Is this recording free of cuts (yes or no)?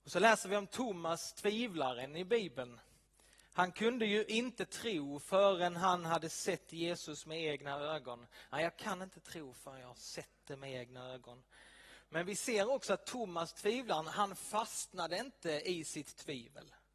yes